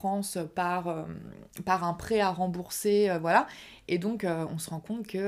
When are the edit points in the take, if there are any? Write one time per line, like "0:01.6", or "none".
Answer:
none